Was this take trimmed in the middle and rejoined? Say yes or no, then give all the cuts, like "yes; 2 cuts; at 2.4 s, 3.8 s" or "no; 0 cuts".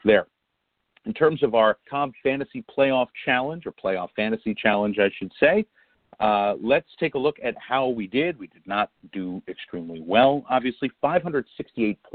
no; 0 cuts